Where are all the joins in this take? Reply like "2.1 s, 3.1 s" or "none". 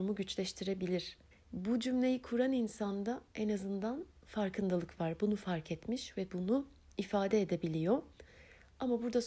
1.3 s